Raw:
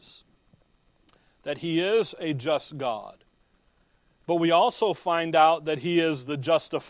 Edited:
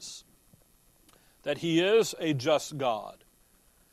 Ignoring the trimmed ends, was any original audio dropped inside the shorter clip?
no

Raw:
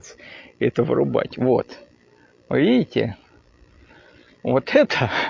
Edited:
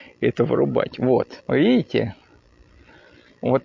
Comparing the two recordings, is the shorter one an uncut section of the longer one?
no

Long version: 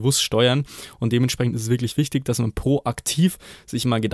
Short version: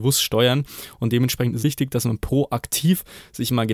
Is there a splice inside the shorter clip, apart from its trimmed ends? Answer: yes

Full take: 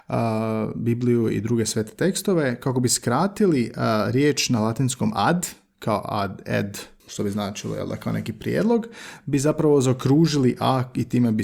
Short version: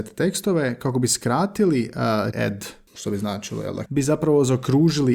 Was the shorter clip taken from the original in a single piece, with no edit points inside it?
no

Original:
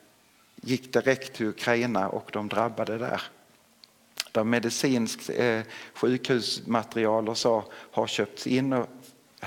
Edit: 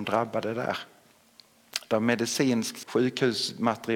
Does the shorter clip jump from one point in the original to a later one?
yes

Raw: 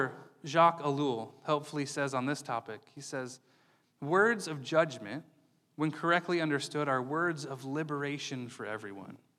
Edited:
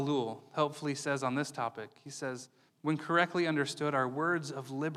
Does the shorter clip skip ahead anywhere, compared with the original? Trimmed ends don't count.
yes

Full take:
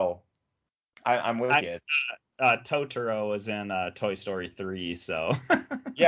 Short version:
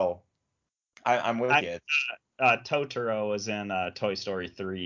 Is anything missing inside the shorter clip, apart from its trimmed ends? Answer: no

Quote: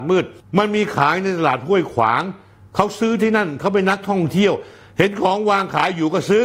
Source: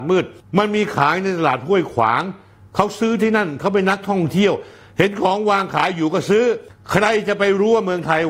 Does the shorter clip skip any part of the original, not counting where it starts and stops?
no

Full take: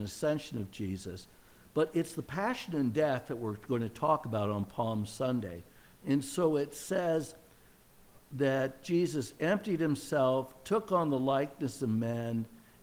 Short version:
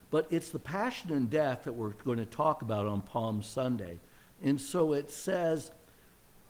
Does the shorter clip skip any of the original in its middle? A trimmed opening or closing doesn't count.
no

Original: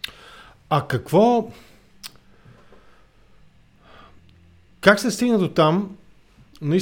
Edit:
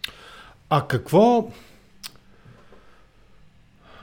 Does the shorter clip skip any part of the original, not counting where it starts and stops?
no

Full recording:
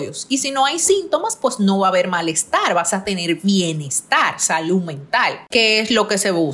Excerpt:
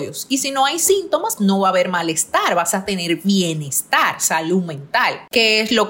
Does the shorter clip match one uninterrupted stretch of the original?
no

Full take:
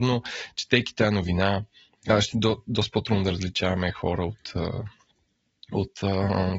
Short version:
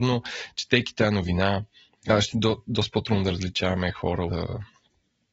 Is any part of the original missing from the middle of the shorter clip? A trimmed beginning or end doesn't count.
yes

